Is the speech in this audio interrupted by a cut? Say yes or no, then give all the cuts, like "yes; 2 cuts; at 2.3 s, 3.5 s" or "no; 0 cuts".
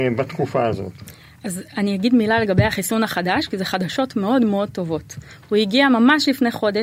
no; 0 cuts